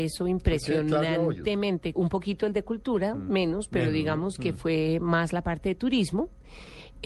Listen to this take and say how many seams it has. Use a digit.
1